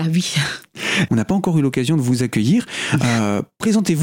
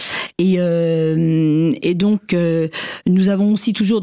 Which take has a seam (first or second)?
first